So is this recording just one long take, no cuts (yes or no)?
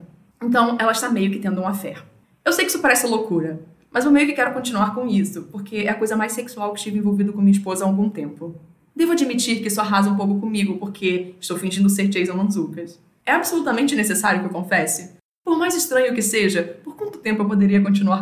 yes